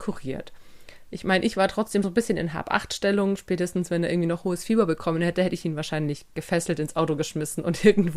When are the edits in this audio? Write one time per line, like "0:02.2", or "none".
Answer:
0:02.0